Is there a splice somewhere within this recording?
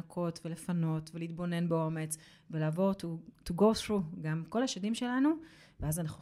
no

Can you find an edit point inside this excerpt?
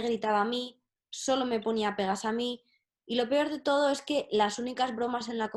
no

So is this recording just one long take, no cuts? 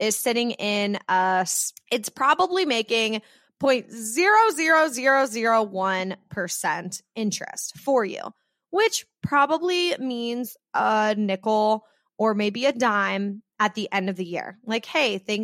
no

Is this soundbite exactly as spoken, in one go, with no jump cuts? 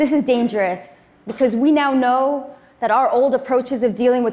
yes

